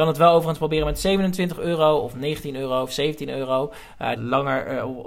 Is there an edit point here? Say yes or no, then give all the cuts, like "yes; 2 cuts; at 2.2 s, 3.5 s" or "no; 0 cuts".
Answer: yes; 1 cut; at 4.2 s